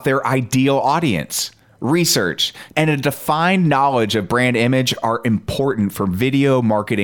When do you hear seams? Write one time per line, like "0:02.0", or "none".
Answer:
0:02.7